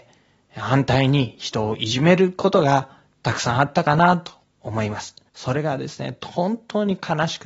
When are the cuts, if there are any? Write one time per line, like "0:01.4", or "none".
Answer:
0:05.3